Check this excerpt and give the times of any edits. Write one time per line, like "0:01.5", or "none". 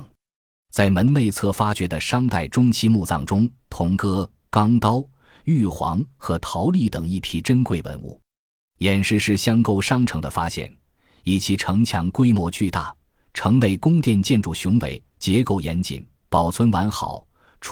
0:03.6